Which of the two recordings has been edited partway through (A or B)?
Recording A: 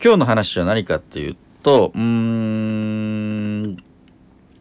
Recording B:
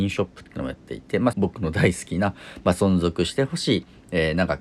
B